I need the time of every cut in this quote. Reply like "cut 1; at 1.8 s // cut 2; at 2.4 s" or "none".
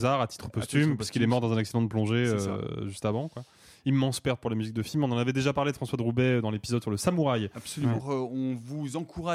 cut 1; at 8.0 s